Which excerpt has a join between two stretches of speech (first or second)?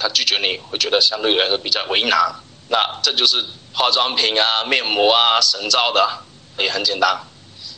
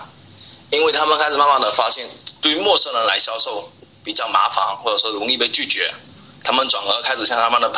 first